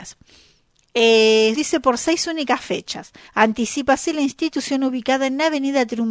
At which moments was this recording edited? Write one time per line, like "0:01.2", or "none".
0:01.6
0:03.3